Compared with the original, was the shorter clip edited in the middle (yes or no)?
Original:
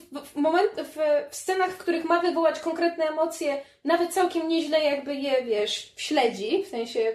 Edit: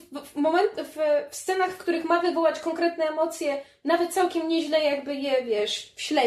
no